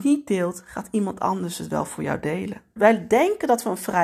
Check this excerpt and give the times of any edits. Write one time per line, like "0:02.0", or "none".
0:02.8